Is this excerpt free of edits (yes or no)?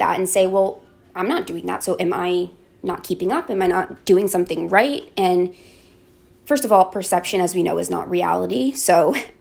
yes